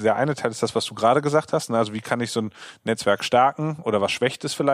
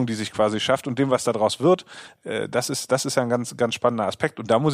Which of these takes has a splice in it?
second; 1 cut; at 2.2 s

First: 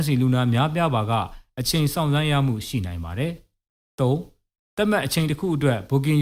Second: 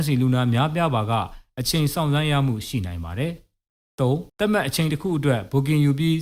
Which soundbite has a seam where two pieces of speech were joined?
second; 1 cut; at 4.3 s

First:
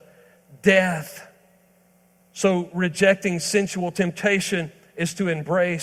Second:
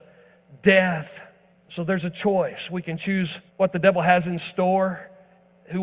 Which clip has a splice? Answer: second; 2 cuts; at 1.5 s, 3.5 s

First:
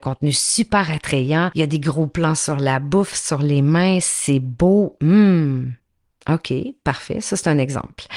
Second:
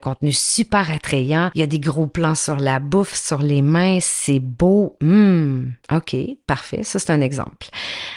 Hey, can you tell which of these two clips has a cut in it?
second; 1 cut; at 5.8 s

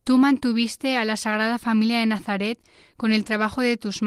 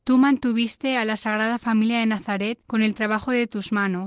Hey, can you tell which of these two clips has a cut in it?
second; 1 cut; at 2.6 s

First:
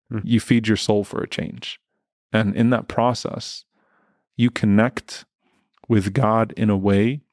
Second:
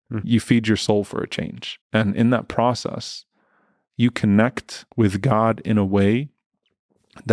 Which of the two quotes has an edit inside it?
second; 2 cuts; at 1.8 s, 4.9 s

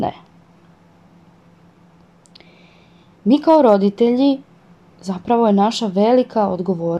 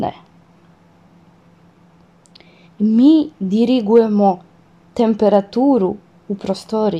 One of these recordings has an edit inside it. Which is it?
second; 1 cut; at 2.6 s

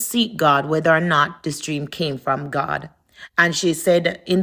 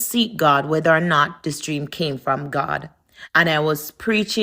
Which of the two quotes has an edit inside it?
second; 1 cut; at 3.3 s

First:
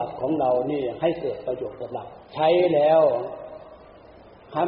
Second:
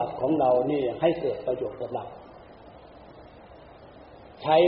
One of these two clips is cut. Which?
first; 1 cut; at 2.2 s

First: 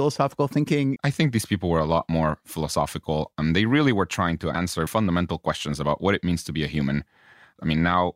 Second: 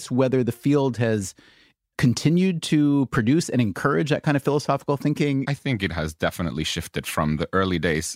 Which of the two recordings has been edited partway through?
first; 2 cuts; at 1.0 s, 4.9 s

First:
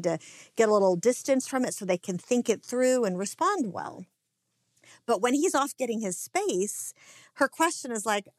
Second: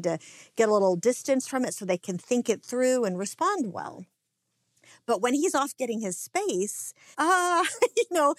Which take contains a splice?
second; 1 cut; at 7.1 s

